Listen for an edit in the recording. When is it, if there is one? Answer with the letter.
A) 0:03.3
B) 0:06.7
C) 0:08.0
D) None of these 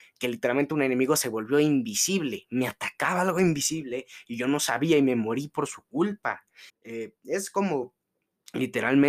B